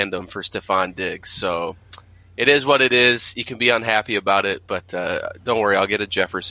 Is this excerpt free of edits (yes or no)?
yes